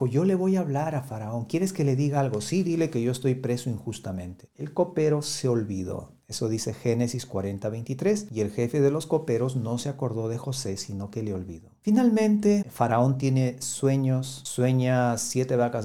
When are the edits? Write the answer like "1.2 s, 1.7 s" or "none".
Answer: 4.5 s, 12.6 s